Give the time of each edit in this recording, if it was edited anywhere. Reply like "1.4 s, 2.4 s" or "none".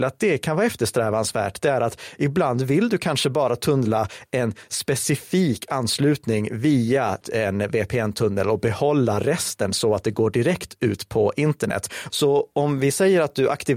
7.2 s, 12.1 s

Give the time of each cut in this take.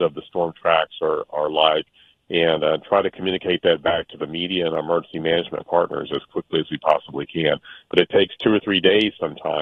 none

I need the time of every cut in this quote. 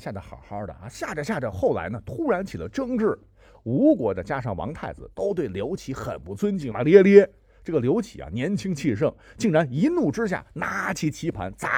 6.7 s

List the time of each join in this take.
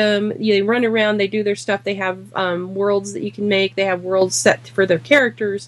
none

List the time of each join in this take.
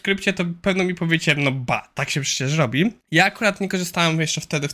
3.0 s

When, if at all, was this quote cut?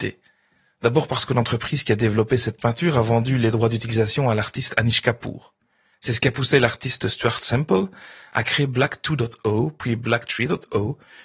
5.9 s

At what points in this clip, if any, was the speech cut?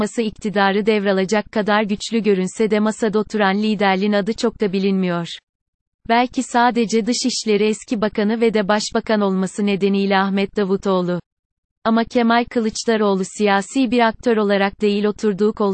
none

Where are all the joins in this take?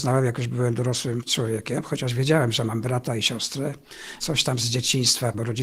none

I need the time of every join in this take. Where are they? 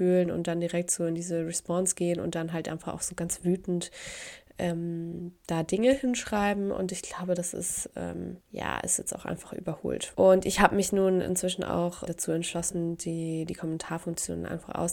8.4 s, 10.1 s, 12.1 s

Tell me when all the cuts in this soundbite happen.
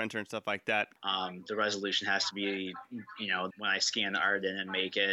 1.0 s, 3.5 s

